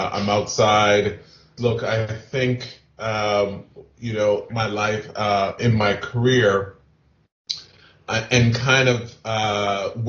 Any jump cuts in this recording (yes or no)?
yes